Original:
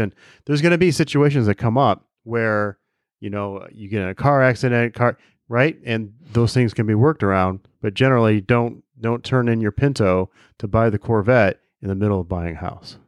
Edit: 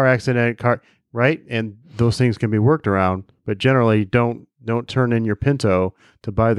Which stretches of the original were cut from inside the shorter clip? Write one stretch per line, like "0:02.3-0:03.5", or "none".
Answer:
none